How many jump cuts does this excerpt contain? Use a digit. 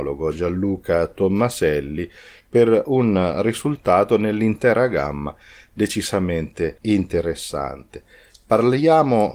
0